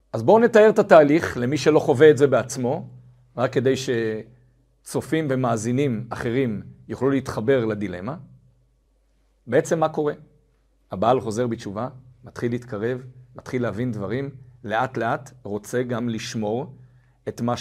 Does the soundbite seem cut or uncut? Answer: uncut